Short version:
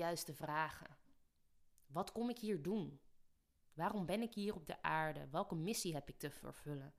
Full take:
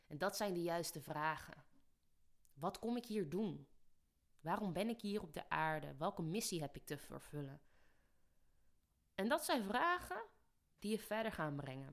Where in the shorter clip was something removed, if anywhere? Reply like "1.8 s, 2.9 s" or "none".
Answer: none